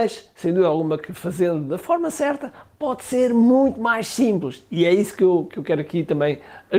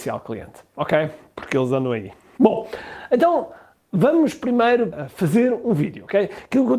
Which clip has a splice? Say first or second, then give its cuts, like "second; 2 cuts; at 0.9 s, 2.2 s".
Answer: second; 1 cut; at 2.4 s